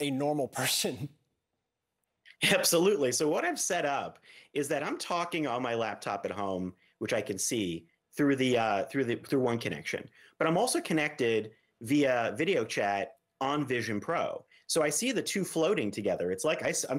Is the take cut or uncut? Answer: uncut